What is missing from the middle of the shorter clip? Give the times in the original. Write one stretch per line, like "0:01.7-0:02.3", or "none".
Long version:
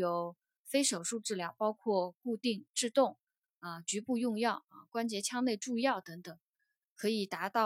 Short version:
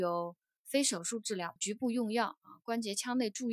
0:01.6-0:03.8